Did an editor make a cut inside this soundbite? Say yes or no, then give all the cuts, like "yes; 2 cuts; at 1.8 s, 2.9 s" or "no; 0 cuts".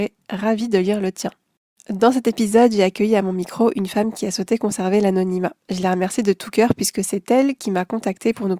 no; 0 cuts